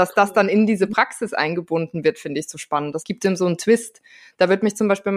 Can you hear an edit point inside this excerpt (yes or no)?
no